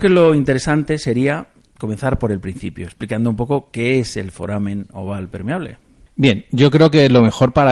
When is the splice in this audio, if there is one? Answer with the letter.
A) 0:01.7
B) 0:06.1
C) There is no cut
C